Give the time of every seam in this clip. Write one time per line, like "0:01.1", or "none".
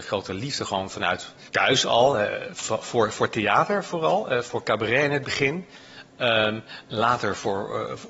0:02.4